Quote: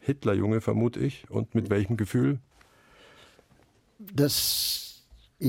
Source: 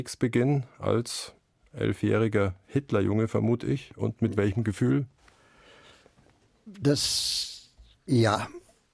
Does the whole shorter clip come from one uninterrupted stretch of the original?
yes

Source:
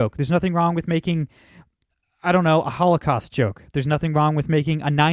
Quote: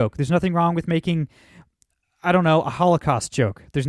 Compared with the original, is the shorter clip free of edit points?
yes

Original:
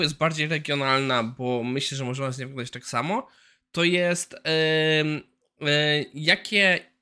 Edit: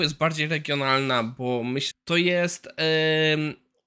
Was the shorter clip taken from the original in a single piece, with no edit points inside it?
no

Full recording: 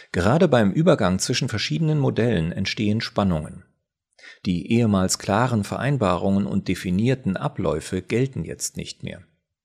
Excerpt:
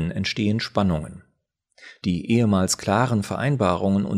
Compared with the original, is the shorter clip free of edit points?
yes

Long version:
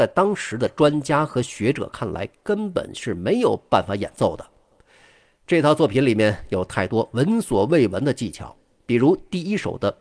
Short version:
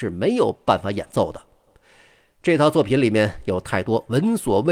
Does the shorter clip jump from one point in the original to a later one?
no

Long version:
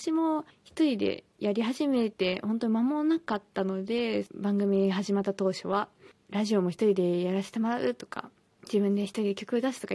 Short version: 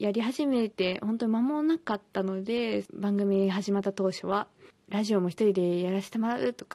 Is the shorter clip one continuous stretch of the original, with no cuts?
yes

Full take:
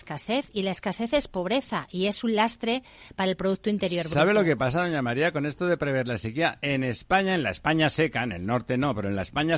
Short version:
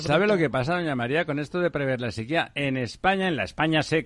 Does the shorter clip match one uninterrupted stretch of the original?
yes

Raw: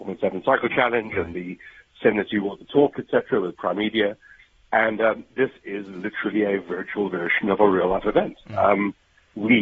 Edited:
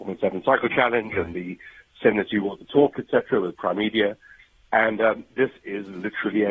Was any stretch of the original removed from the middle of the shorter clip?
no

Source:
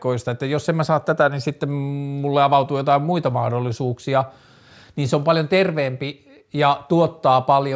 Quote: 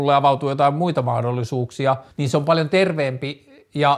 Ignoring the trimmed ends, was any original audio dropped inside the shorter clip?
yes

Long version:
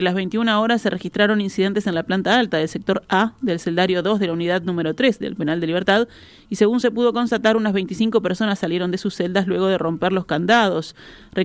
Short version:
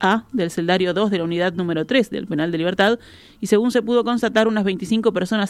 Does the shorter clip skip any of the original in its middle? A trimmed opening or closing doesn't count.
no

